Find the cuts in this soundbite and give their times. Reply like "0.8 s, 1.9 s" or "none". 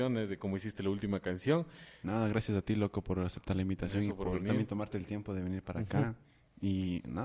2.0 s